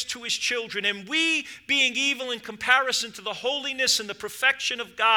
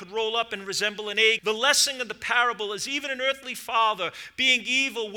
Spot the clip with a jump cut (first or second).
second